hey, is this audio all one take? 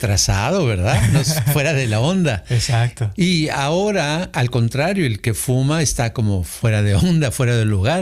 yes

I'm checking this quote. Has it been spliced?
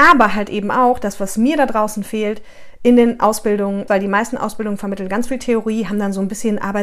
yes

